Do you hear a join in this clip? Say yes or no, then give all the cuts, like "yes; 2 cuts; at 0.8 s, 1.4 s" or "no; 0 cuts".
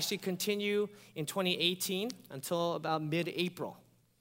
no; 0 cuts